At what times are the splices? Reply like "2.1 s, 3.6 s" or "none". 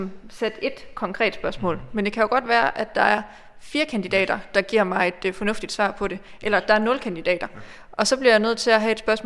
none